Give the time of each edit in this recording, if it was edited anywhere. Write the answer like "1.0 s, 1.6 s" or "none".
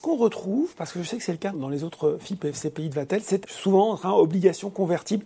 1.5 s, 3.4 s